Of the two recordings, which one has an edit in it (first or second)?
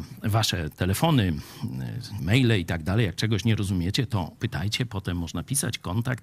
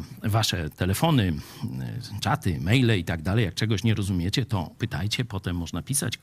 first